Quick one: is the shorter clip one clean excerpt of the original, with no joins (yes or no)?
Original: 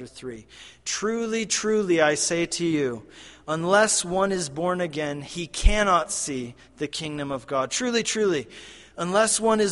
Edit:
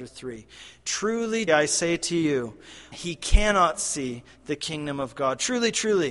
no